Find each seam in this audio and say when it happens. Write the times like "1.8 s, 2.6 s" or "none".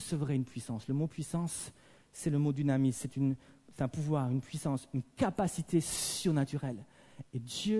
none